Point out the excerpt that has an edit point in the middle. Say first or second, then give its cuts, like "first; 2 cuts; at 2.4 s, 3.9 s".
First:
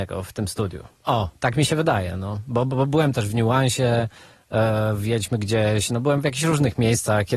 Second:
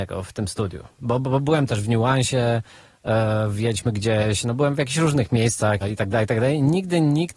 second; 2 cuts; at 1.0 s, 5.8 s